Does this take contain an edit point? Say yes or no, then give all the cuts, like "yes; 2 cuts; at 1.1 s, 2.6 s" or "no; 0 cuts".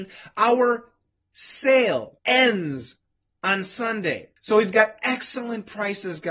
yes; 2 cuts; at 2.2 s, 4.4 s